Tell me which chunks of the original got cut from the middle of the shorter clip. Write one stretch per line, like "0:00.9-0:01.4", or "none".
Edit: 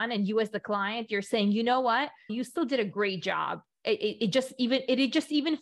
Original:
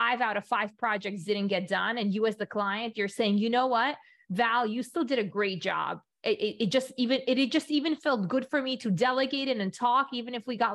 0:04.2-0:04.7

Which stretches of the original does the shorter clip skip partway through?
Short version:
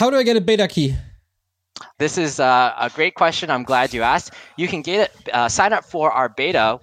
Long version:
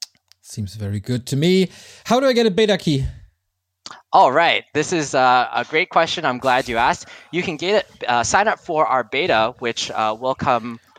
0:04.0-0:04.7

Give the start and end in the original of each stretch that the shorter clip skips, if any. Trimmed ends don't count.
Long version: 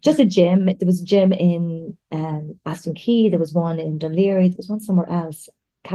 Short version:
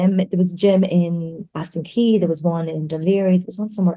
0:02.0-0:02.6

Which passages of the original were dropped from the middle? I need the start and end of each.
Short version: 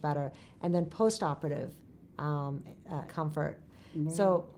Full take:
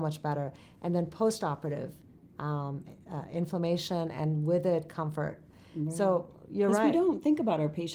0:03.3-0:04.9

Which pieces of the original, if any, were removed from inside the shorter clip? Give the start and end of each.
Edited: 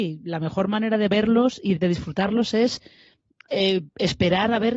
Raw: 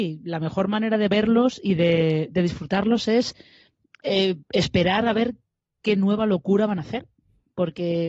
0:01.8-0:02.3

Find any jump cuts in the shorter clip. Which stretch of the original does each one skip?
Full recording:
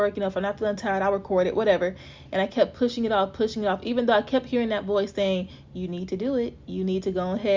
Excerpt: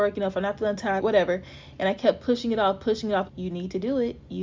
0:01.0-0:01.5
0:03.8-0:05.7

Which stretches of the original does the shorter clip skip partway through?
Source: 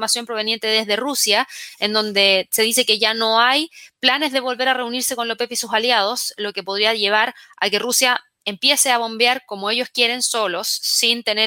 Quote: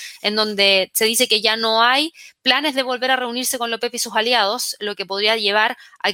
none

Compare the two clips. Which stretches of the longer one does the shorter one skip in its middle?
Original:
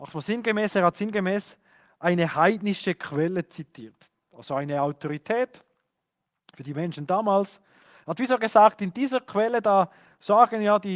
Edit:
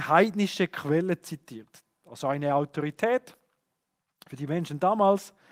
none

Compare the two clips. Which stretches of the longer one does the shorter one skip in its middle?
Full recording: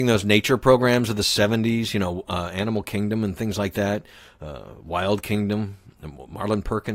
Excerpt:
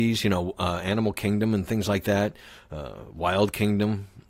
none

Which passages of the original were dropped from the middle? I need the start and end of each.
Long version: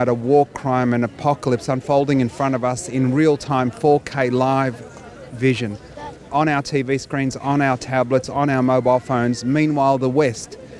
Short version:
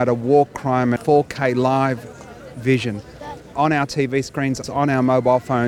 0:01.0-0:03.7
0:07.4-0:08.2

